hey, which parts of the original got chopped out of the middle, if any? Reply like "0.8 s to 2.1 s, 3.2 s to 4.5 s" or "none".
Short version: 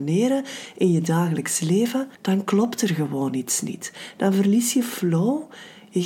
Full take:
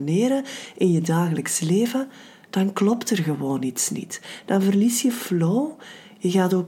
2.1 s to 2.4 s